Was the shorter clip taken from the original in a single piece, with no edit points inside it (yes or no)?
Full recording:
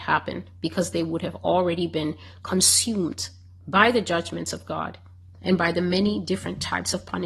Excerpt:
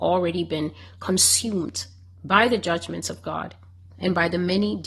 yes